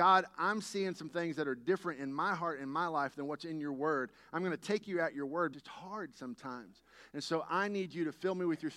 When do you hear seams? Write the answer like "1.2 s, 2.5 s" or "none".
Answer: 5.5 s